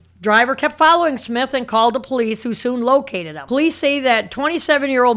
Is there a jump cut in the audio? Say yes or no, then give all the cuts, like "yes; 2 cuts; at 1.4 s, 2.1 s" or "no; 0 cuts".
yes; 1 cut; at 3.5 s